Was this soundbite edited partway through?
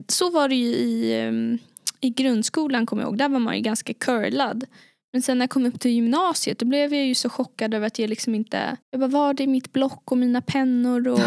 yes; 1 cut; at 8.8 s

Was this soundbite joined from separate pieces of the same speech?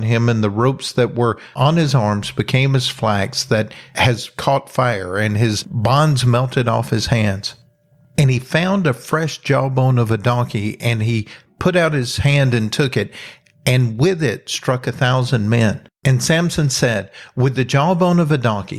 no; 0 cuts

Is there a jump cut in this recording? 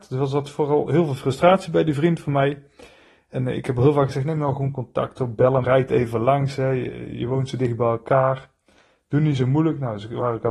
yes; 1 cut; at 5.6 s

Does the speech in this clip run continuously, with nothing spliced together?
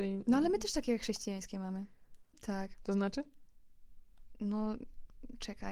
no; 1 cut; at 2.3 s

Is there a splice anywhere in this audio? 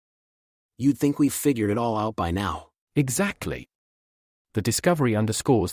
no; 0 cuts

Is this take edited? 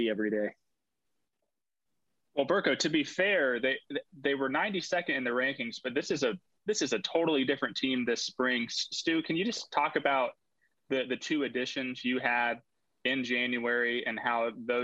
no; 0 cuts

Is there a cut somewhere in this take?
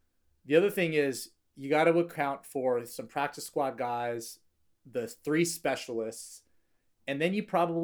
no; 0 cuts

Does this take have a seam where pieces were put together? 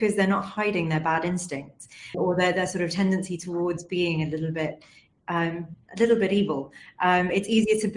yes; 1 cut; at 2.1 s

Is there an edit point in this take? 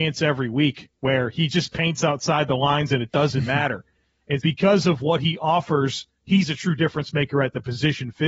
yes; 1 cut; at 4.4 s

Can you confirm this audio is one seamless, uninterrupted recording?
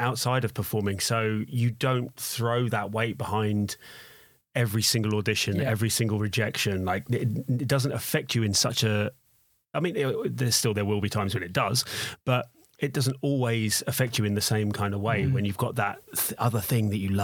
yes; 0 cuts

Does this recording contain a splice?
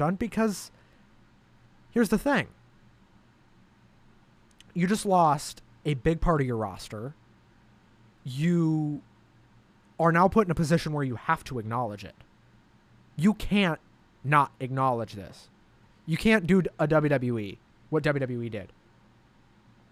no; 0 cuts

